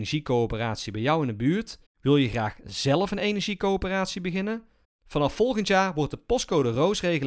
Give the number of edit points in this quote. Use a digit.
2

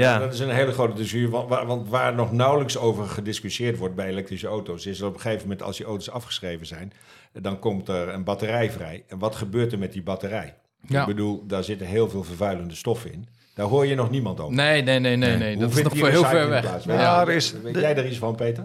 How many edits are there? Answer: 0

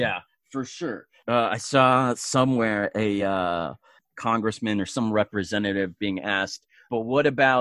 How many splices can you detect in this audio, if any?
0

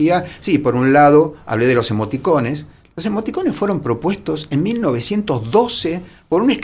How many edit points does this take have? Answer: 0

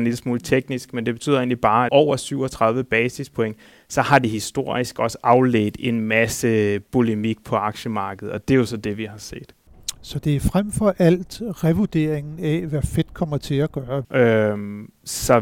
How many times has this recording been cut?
2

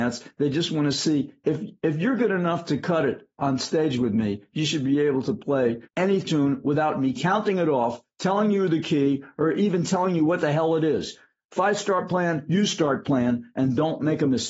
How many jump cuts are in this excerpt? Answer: 1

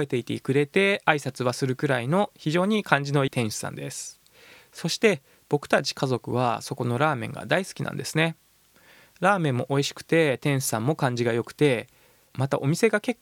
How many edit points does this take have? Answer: 1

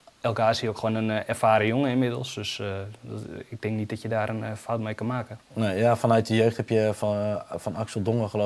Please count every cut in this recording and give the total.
0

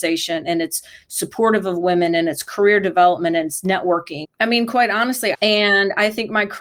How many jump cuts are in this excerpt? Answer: 2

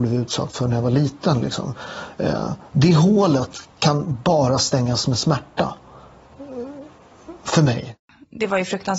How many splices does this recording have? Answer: 0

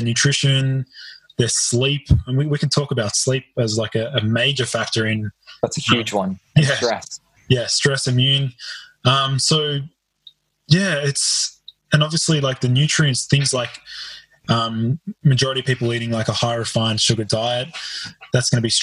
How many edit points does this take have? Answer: 0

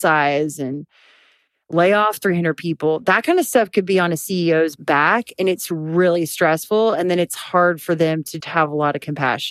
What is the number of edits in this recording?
1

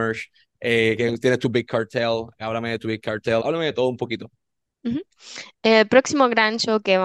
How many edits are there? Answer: 1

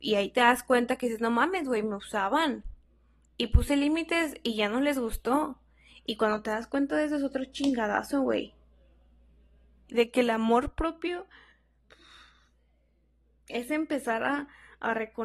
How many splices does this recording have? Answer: 1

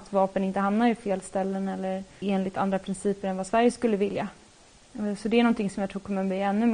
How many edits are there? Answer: 1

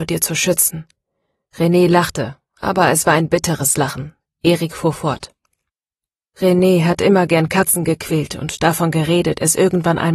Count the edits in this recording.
0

